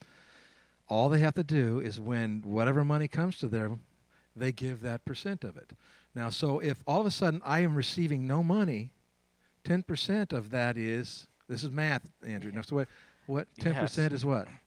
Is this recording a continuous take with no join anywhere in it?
yes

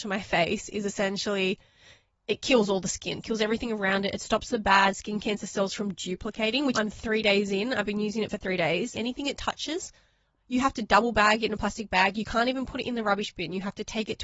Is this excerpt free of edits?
no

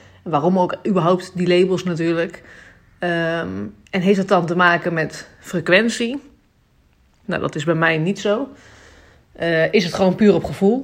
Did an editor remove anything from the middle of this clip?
yes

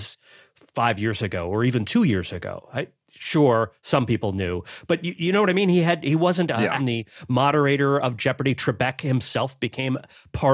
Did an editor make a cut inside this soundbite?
yes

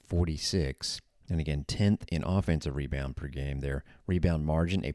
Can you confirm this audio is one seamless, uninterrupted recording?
yes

